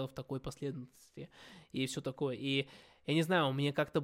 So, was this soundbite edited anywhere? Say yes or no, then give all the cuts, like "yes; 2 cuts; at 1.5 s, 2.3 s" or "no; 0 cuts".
no; 0 cuts